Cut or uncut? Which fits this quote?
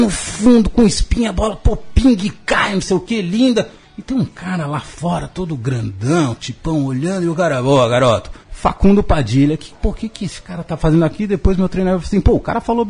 cut